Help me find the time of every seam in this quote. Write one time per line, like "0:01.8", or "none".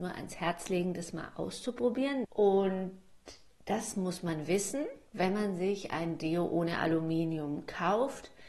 0:02.2
0:05.1